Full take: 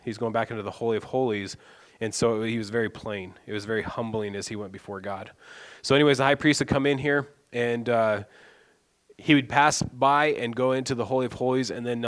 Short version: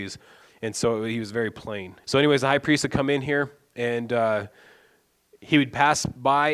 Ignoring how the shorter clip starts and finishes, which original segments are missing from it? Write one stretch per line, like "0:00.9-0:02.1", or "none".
0:03.4-0:05.8

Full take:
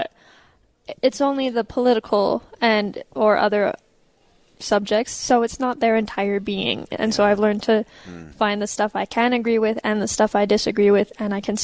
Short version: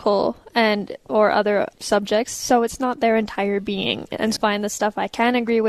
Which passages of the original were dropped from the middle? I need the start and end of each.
0:03.8-0:04.5
0:07.2-0:08.3

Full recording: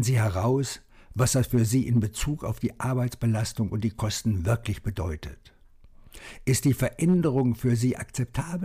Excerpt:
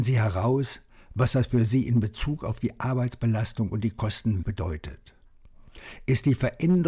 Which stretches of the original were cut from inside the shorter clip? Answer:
0:04.4-0:04.8

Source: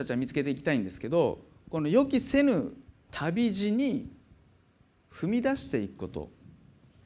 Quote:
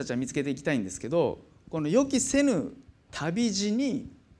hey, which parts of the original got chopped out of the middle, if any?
none

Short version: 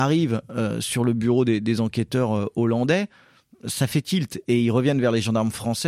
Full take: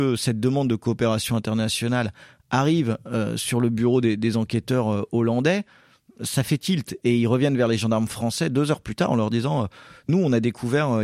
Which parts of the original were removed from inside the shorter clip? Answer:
none

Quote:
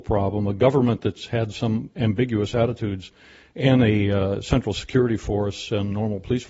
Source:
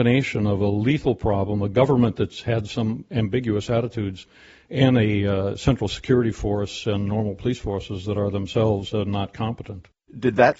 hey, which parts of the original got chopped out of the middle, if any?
none

